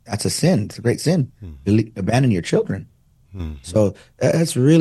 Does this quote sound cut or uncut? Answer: cut